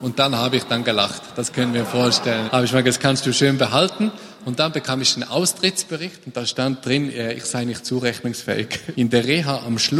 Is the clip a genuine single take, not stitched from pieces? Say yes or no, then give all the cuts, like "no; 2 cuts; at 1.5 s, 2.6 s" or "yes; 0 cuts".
no; 2 cuts; at 2.5 s, 8.9 s